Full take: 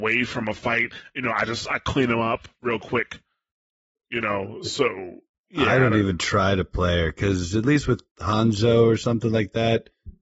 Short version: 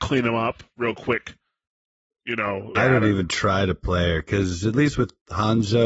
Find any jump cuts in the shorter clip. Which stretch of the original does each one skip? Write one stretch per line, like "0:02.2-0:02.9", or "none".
0:04.6-0:05.6